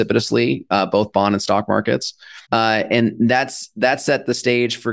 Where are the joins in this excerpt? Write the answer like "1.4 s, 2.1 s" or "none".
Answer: 2.4 s

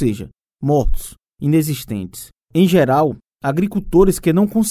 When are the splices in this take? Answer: 2.4 s

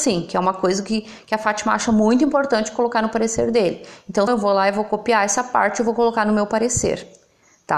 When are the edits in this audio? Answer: 4.3 s

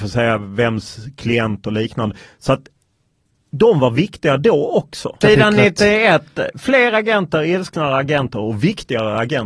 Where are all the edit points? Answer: 5.2 s

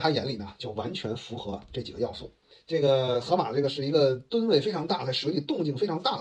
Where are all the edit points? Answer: 2.5 s

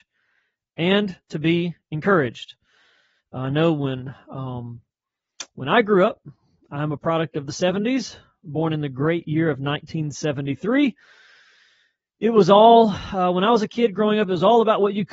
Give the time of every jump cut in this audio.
none

